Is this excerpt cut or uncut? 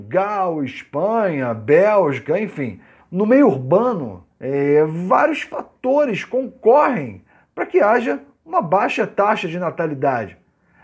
cut